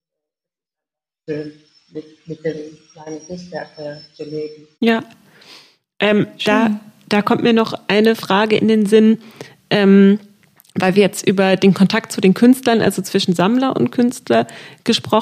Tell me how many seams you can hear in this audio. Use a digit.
1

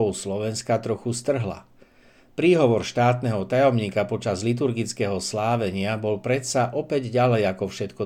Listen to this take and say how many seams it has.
0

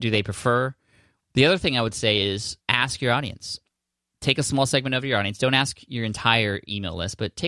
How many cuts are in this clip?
2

